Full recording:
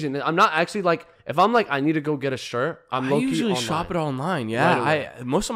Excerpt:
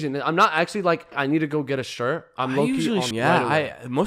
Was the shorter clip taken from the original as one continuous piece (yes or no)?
no